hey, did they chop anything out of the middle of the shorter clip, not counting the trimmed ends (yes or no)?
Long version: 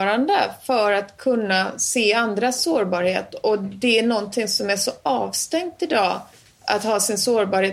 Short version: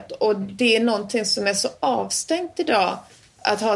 no